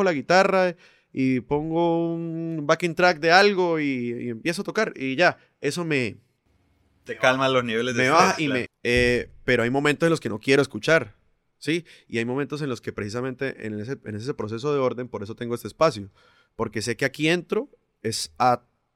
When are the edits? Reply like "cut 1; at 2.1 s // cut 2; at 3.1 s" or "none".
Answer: cut 1; at 8.7 s